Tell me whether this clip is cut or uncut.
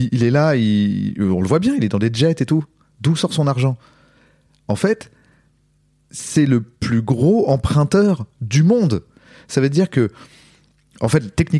uncut